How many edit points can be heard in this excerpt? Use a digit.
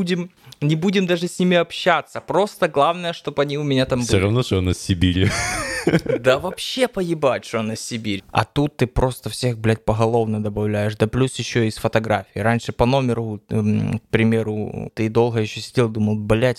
2